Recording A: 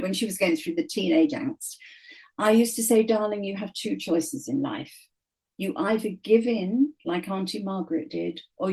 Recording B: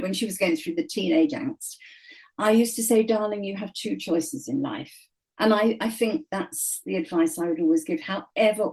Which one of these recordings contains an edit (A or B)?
B